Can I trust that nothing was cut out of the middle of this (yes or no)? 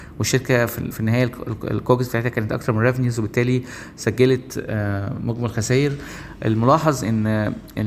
no